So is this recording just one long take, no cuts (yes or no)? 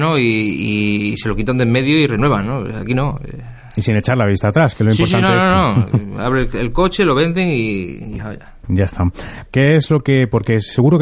no